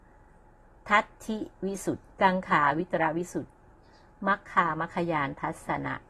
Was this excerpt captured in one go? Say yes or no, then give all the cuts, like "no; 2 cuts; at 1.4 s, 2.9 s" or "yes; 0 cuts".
no; 1 cut; at 2.1 s